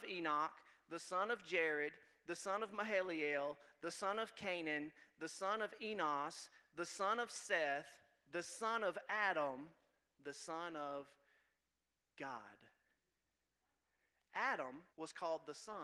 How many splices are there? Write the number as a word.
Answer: one